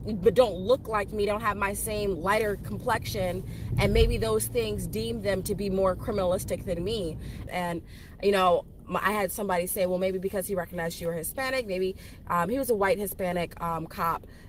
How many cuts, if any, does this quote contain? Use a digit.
1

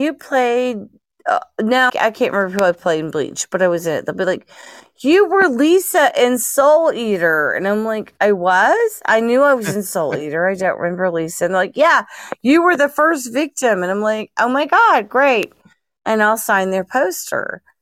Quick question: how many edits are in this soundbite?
1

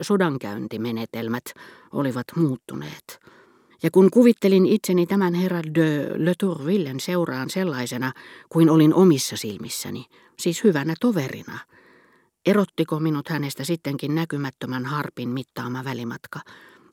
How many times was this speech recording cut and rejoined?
1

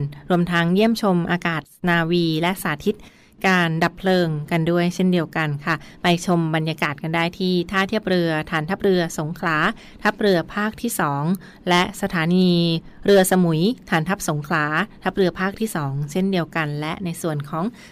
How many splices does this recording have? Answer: 0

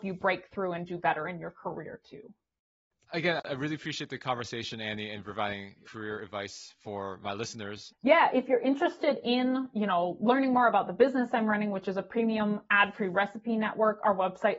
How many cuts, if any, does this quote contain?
2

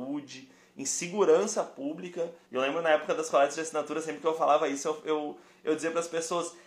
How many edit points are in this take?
1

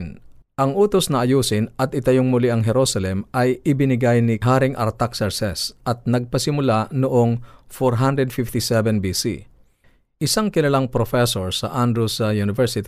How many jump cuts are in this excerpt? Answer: 0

